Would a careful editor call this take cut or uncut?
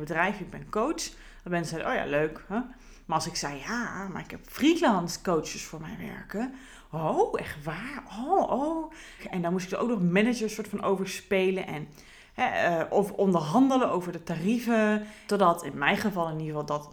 cut